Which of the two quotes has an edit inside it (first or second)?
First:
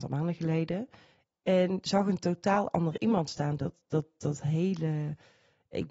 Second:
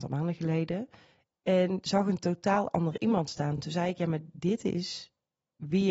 first